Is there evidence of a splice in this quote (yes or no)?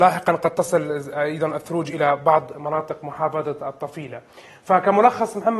no